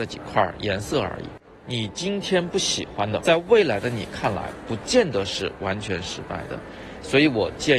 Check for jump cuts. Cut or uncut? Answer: cut